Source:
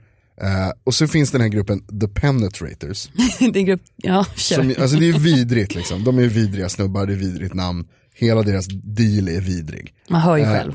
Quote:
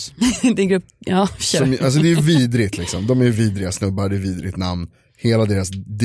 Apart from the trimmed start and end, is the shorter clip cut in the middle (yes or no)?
no